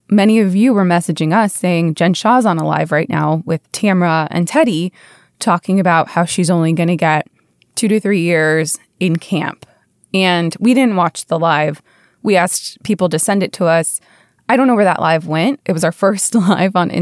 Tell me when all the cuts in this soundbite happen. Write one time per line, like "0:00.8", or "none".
0:15.6